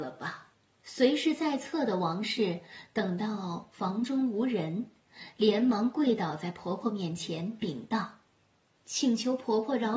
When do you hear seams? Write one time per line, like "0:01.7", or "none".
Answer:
0:08.3